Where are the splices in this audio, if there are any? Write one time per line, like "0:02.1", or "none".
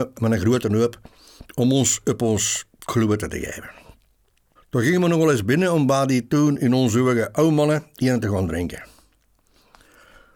0:04.6